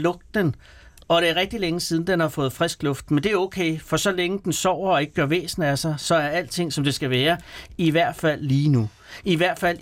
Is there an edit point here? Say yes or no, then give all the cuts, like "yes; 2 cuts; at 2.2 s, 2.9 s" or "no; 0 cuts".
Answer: no; 0 cuts